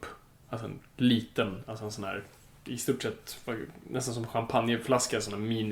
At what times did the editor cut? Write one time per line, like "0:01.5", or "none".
none